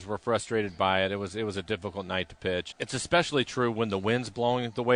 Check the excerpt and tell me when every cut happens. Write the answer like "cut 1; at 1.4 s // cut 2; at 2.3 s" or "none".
cut 1; at 2.7 s